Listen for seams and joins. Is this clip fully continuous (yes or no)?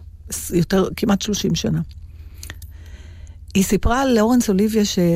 yes